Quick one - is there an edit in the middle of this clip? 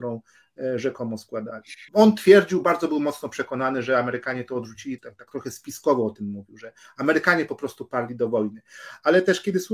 yes; 2 cuts; at 1.9 s, 5.0 s

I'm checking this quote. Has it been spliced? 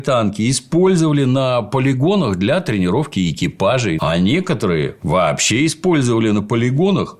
yes; 1 cut; at 4.0 s

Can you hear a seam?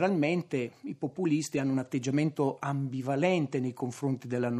no; 0 cuts

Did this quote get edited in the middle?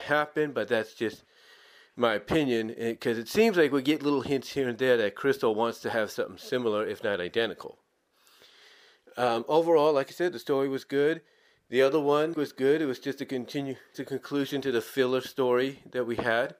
yes; 2 cuts; at 12.3 s, 13.9 s

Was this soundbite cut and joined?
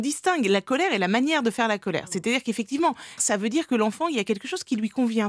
yes; 1 cut; at 3.2 s

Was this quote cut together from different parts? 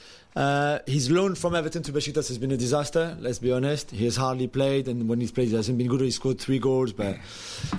no; 0 cuts

